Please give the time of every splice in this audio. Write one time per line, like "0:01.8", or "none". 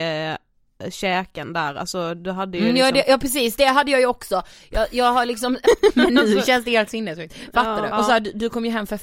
0:05.6
0:07.9